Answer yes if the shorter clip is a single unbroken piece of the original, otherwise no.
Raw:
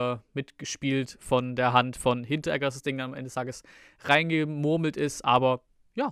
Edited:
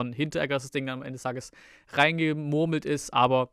yes